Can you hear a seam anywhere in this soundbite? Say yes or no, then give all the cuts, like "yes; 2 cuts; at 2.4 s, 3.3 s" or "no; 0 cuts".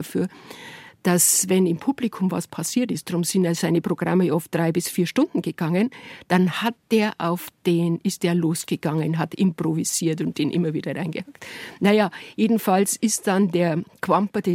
no; 0 cuts